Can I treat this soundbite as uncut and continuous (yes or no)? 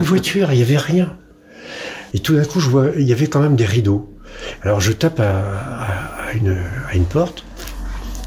no